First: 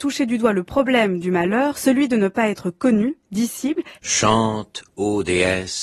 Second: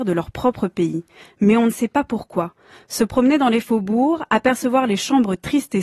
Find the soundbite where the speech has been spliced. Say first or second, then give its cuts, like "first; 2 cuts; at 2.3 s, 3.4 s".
first; 1 cut; at 4.0 s